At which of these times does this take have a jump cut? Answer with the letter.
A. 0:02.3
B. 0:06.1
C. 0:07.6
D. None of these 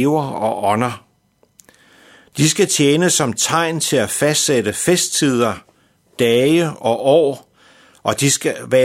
A